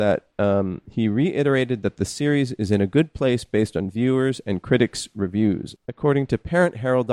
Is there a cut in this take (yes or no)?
yes